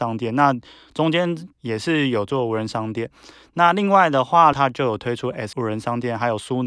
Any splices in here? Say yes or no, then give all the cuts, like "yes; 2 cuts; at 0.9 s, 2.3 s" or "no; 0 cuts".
yes; 3 cuts; at 1.5 s, 4.5 s, 5.5 s